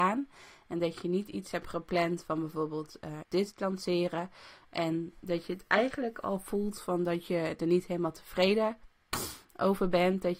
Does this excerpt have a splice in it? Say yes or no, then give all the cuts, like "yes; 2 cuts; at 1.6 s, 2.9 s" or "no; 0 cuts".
yes; 1 cut; at 3.2 s